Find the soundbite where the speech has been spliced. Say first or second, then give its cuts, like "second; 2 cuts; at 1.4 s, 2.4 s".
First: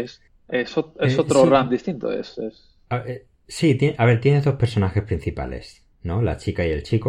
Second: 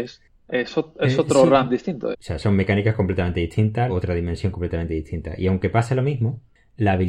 second; 2 cuts; at 2.1 s, 3.9 s